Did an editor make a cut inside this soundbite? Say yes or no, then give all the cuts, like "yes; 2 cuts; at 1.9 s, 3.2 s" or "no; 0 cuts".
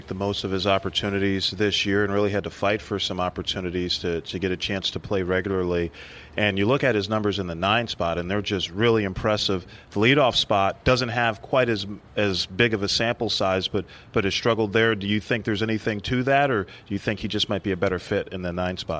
no; 0 cuts